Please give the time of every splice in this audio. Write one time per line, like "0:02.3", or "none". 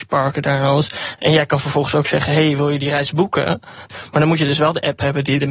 0:01.2
0:03.9